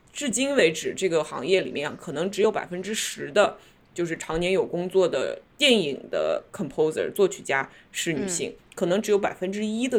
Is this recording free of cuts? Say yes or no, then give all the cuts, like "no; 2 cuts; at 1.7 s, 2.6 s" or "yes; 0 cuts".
no; 1 cut; at 8.6 s